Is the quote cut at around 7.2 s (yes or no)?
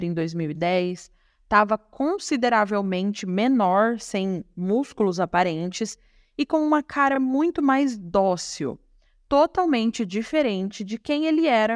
no